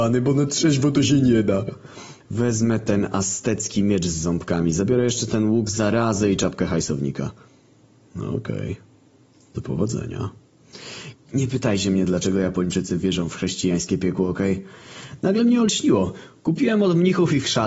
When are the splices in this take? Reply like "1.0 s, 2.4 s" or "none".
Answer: 2.2 s, 11.1 s